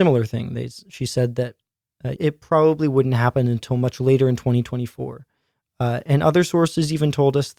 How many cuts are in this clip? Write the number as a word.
one